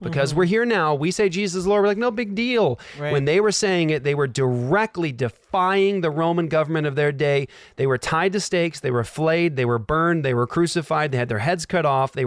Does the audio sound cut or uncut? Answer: uncut